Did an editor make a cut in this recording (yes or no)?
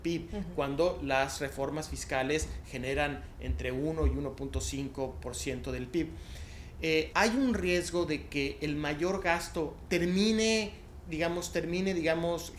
yes